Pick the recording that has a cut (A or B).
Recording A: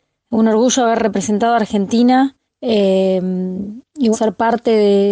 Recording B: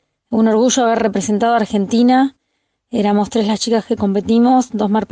A